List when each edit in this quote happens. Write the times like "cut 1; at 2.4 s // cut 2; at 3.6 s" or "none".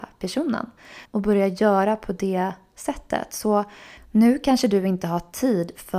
cut 1; at 1.0 s